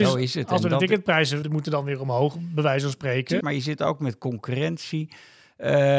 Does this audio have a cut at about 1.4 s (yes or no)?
yes